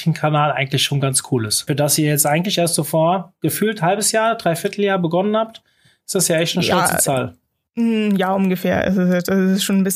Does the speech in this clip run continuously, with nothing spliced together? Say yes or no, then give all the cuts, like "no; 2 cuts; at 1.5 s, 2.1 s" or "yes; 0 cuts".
no; 1 cut; at 1.7 s